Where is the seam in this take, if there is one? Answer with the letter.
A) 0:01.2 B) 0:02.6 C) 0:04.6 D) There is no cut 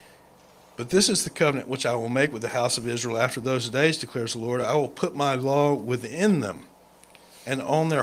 D